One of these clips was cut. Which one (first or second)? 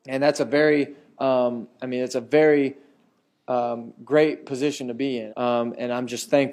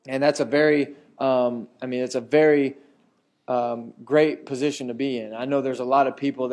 first